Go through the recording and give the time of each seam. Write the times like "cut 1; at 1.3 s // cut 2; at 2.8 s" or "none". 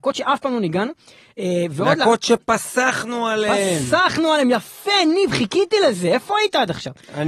none